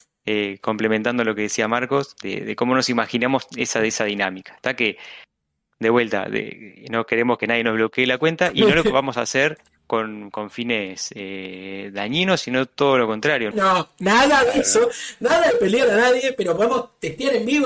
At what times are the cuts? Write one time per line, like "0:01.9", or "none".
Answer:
0:13.5